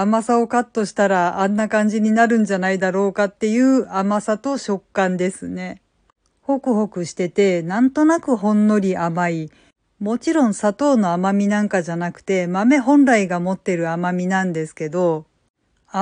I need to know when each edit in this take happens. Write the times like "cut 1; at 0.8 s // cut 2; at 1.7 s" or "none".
cut 1; at 6.3 s